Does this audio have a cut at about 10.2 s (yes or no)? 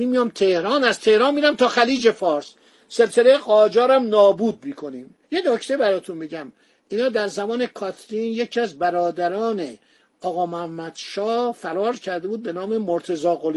no